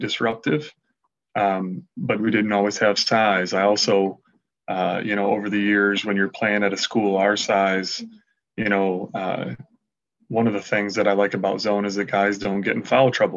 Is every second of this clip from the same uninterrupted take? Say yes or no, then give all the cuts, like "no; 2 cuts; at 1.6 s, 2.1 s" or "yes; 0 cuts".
no; 1 cut; at 2.2 s